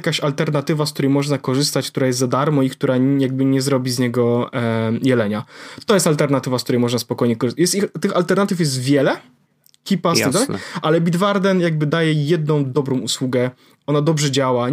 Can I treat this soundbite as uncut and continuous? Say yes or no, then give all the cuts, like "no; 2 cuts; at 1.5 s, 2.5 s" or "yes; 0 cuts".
yes; 0 cuts